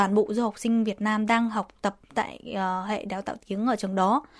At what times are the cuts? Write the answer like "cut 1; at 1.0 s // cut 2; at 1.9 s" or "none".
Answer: none